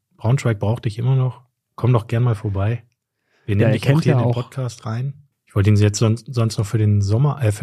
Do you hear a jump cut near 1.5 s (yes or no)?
no